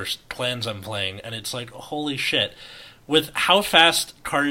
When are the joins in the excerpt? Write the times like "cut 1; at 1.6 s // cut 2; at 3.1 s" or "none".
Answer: none